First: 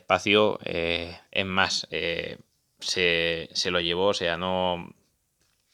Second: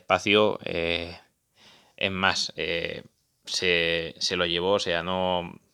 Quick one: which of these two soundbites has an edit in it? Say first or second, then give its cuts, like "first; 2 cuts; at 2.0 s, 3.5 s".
first; 1 cut; at 1.3 s